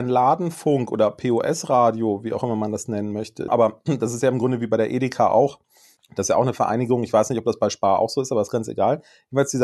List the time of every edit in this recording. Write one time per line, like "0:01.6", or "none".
0:03.5